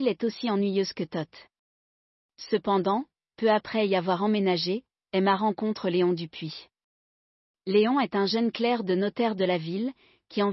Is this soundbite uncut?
yes; 0 cuts

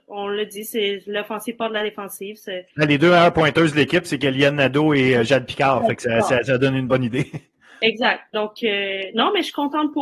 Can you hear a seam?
no; 0 cuts

